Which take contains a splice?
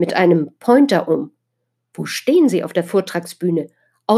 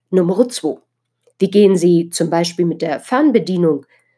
second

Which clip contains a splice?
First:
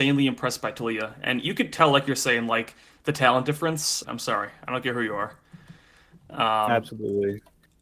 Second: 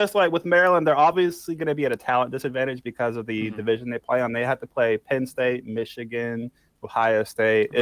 first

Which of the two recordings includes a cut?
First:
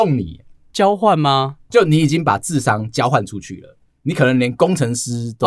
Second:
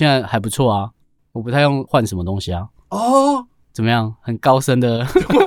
first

